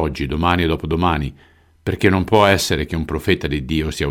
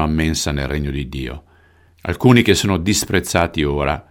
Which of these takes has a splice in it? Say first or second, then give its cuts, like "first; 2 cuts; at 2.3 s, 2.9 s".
second; 1 cut; at 1.9 s